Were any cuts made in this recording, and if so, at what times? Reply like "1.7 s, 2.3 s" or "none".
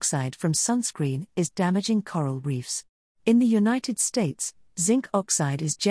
3.1 s